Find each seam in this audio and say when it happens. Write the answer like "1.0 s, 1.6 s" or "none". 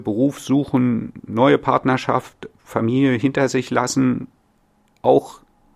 none